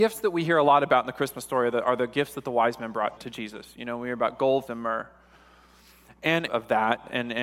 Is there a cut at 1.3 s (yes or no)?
no